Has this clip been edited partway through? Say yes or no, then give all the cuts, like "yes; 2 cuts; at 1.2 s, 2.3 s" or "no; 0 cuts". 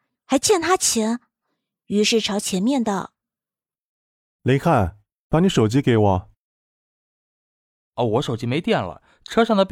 no; 0 cuts